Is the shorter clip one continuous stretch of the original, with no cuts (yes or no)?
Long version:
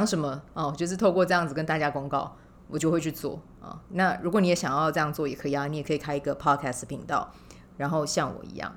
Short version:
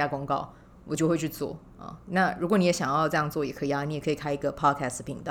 yes